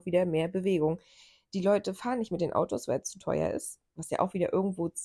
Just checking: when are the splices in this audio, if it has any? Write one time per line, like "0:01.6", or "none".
none